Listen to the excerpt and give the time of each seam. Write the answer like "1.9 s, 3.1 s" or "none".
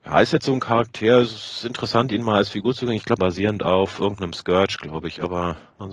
3.2 s